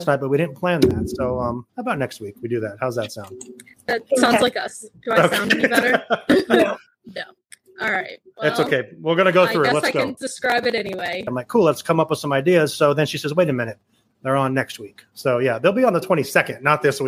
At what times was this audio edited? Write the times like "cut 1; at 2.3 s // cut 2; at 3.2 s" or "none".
cut 1; at 10.2 s // cut 2; at 11.3 s

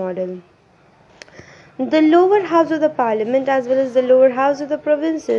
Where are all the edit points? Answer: none

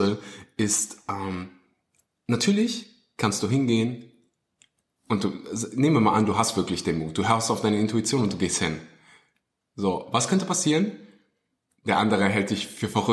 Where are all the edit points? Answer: none

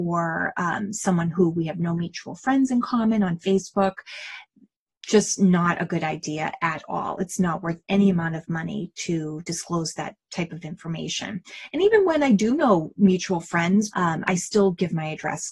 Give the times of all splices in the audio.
cut 1; at 13.9 s

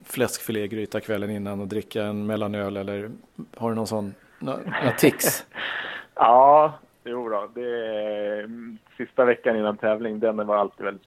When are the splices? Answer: none

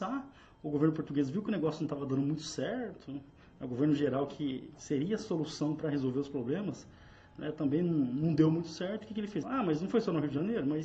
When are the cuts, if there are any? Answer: cut 1; at 9.4 s

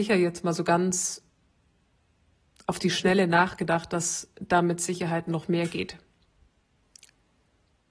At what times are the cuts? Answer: none

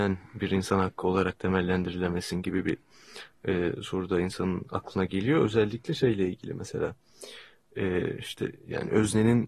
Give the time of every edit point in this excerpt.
none

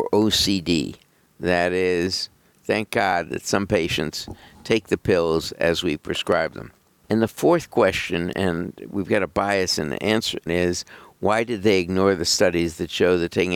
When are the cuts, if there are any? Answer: cut 1; at 7.0 s // cut 2; at 10.5 s

